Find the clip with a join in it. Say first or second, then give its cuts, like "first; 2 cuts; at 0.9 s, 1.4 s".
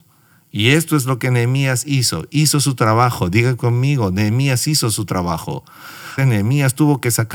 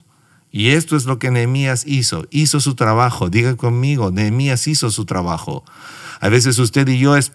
first; 1 cut; at 6.2 s